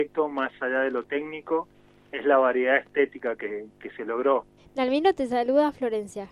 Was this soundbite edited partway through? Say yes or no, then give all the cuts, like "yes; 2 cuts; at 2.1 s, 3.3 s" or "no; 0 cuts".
yes; 1 cut; at 4.6 s